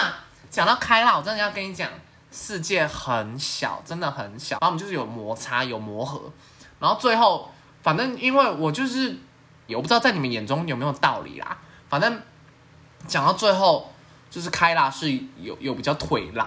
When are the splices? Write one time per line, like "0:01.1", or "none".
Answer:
0:04.6
0:09.7